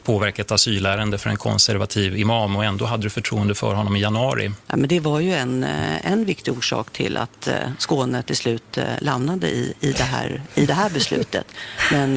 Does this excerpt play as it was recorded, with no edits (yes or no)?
no